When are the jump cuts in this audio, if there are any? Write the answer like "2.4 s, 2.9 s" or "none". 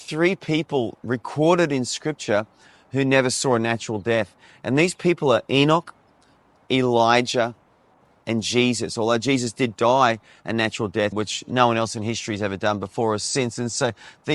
11.1 s